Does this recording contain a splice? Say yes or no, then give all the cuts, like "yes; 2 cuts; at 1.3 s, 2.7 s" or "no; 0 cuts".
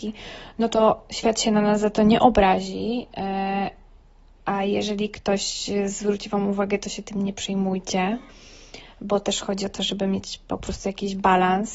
no; 0 cuts